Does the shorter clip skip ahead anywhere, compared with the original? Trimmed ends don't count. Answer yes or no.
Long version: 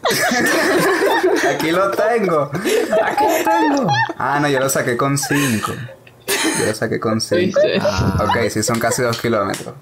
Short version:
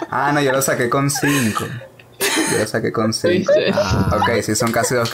no